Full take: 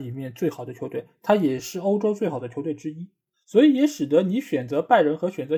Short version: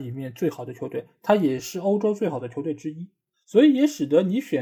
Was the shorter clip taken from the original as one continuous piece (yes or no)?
yes